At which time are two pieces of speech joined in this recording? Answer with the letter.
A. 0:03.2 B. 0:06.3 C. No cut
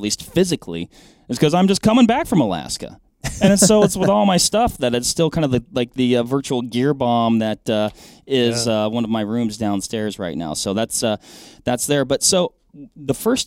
C